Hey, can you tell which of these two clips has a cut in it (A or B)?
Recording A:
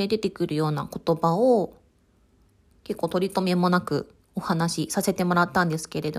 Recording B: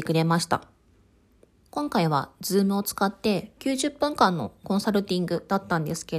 B